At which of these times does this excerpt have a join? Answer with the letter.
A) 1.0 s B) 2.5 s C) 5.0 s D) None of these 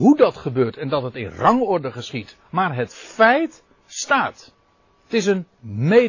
B